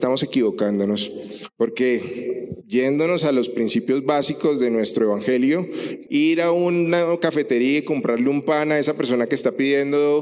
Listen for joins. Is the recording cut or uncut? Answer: cut